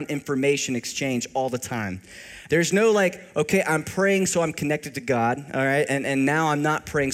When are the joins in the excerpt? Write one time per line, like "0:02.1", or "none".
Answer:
0:02.5